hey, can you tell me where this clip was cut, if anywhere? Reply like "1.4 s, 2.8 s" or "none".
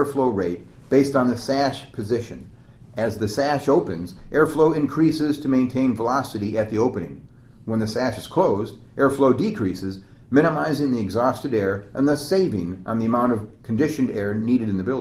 none